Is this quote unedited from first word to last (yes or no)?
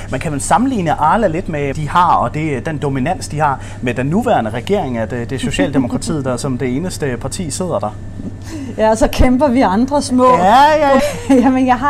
no